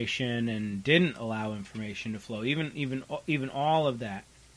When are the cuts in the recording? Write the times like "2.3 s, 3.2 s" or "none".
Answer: none